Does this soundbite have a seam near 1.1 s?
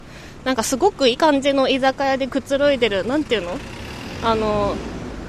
yes; 1 cut; at 1.1 s

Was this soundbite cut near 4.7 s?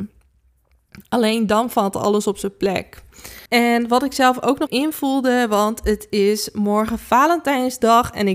yes; 2 cuts; at 3.5 s, 4.7 s

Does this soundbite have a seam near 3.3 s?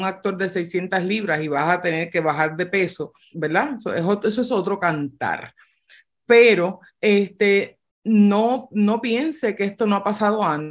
yes; 1 cut; at 3.3 s

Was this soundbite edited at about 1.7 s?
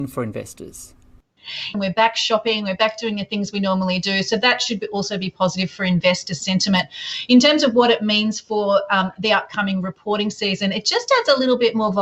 yes; 1 cut; at 1.7 s

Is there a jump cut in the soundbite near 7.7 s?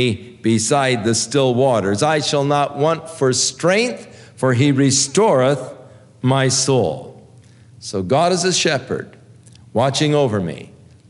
no; 0 cuts

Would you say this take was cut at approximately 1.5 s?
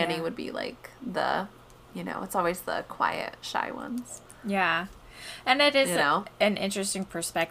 no; 0 cuts

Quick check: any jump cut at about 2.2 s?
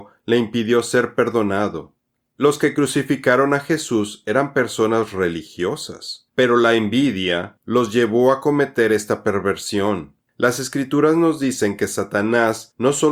no; 2 cuts; at 7.6 s, 10.3 s

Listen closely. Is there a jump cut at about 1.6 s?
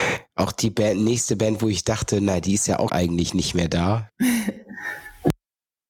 no; 1 cut; at 2.9 s

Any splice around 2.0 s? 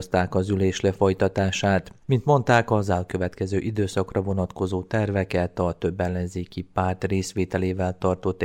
yes; 1 cut; at 2.0 s

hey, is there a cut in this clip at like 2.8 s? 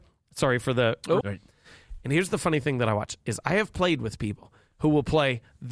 no; 1 cut; at 1.2 s

